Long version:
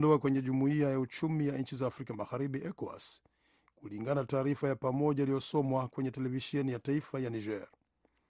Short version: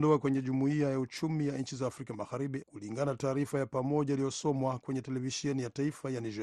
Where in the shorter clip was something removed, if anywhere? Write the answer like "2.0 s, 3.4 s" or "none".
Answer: 2.6 s